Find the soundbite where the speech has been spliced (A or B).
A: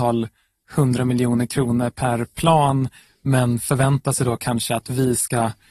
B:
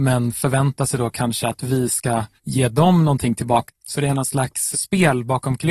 B